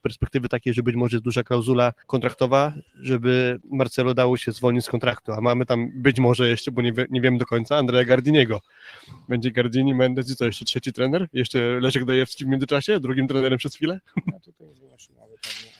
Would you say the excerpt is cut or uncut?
cut